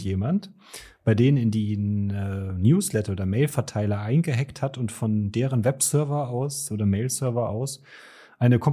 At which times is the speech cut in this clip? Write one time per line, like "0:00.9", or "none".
none